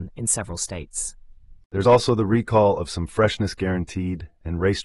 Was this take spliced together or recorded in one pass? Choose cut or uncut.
uncut